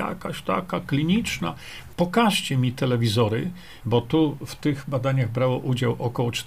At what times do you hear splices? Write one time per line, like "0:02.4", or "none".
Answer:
0:01.9
0:03.8